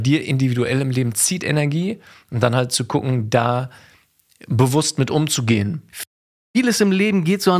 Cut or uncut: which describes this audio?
cut